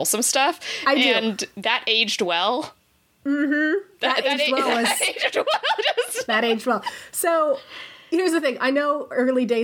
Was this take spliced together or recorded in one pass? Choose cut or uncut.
uncut